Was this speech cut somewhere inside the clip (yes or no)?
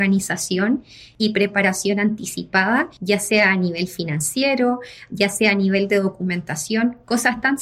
no